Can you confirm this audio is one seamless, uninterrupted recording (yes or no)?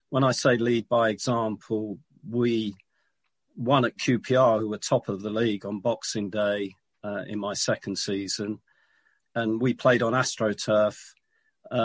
no